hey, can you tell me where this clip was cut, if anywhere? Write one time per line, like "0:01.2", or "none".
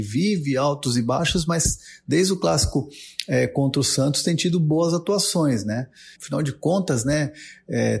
0:06.2